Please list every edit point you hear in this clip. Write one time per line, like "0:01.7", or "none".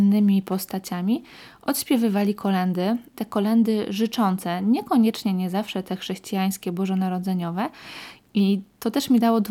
0:03.1
0:08.2